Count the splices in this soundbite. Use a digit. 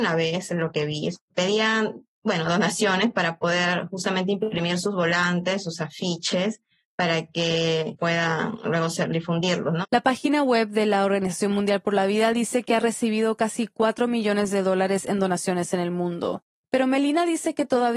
2